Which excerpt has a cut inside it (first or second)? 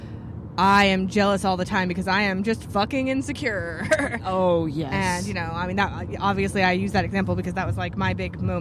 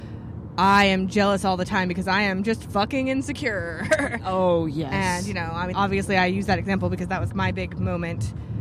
second